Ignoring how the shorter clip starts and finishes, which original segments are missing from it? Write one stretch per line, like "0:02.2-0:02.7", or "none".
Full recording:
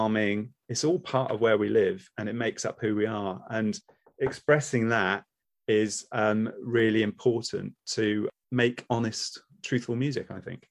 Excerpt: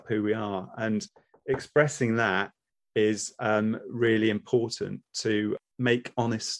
none